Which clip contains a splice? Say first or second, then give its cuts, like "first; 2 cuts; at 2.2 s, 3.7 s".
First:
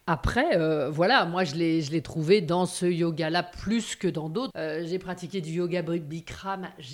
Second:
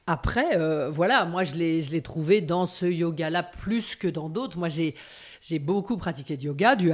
first; 1 cut; at 4.5 s